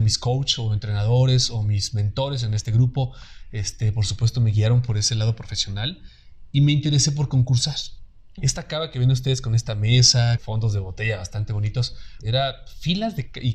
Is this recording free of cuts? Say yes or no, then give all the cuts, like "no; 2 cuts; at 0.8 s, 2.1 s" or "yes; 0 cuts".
no; 3 cuts; at 8.4 s, 10.4 s, 12.2 s